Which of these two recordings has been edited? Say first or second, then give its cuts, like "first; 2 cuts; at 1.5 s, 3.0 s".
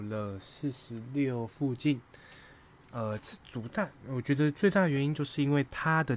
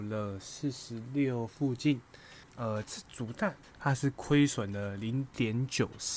second; 2 cuts; at 2.4 s, 3.6 s